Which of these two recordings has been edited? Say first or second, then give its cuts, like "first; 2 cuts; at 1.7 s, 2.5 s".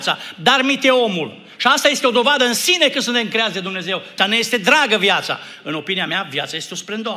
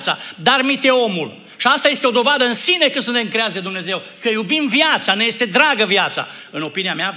first; 1 cut; at 4.2 s